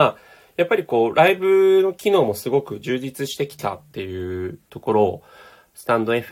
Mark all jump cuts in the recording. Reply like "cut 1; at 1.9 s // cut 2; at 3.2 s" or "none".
none